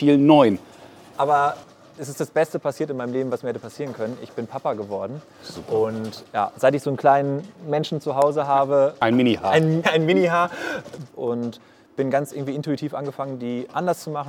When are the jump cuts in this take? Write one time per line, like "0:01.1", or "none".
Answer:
0:01.1
0:09.8
0:11.1